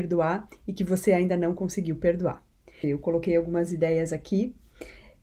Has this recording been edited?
yes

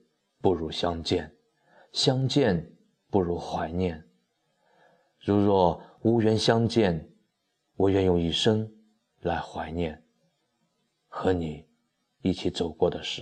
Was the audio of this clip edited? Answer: no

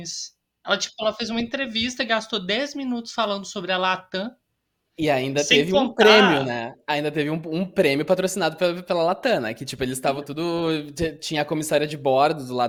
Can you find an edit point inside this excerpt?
yes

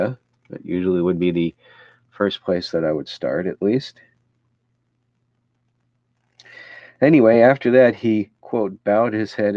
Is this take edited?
no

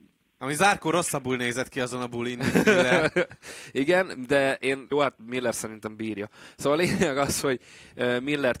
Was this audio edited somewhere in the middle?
yes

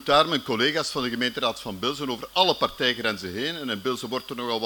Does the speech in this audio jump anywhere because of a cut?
no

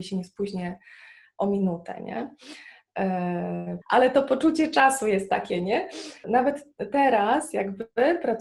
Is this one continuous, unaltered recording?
no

